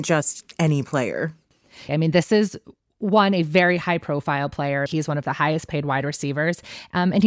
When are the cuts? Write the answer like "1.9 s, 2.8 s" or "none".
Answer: 1.9 s, 4.9 s